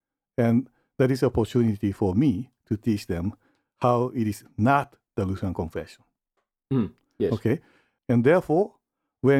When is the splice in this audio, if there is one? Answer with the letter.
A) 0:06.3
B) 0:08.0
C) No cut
B